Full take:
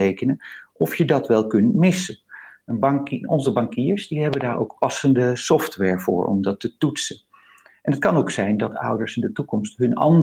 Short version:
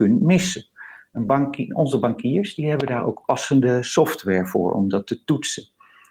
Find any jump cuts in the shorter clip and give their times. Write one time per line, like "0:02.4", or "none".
none